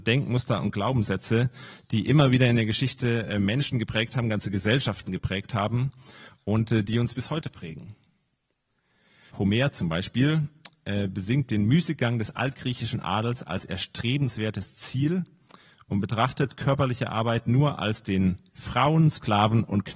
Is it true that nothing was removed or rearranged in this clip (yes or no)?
no